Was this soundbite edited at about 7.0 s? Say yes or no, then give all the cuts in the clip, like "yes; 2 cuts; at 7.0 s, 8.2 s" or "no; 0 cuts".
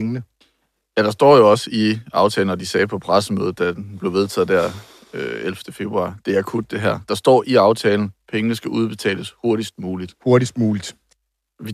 no; 0 cuts